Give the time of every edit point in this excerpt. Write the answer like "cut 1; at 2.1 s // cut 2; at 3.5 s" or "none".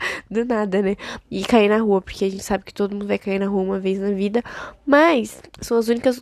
cut 1; at 1.2 s